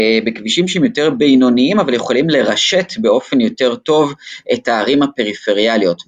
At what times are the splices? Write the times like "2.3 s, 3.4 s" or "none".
none

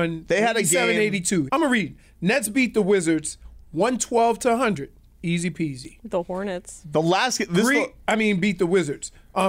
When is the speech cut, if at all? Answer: 1.5 s

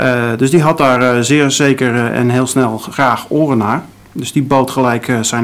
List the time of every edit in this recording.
none

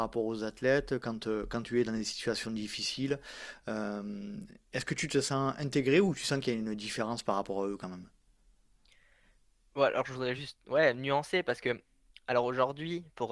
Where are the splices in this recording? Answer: none

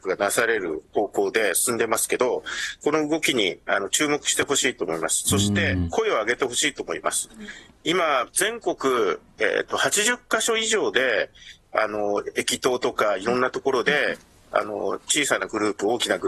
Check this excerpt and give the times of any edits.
8.3 s

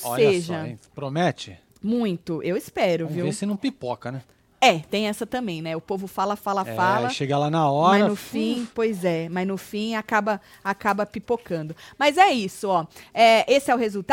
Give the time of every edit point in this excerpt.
none

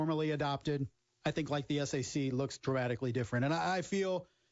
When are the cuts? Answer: 1.2 s

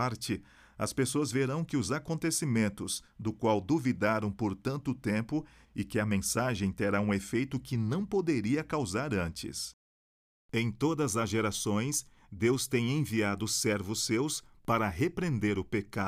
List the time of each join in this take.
5.6 s

